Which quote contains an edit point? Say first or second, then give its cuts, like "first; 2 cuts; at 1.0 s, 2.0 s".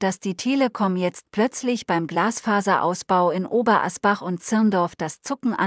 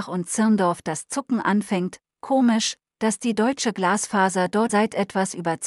second; 1 cut; at 4.7 s